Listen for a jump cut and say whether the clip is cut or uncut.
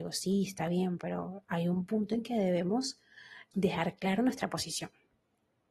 cut